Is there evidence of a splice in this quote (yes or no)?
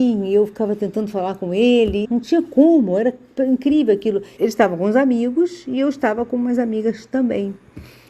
yes